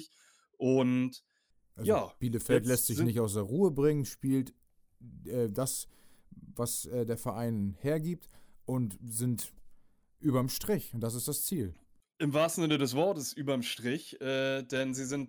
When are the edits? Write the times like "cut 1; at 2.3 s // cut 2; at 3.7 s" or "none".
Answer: none